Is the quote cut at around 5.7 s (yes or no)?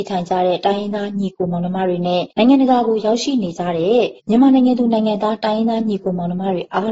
no